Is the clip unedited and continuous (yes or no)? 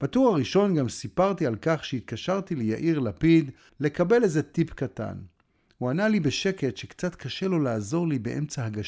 no